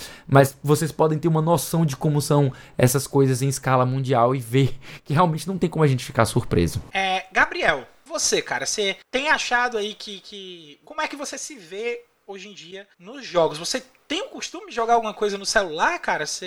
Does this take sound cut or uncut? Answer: cut